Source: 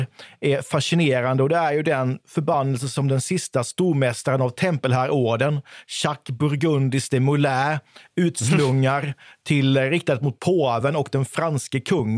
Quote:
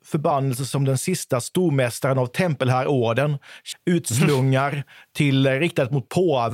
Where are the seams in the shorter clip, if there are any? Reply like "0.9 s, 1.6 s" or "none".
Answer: 3.7 s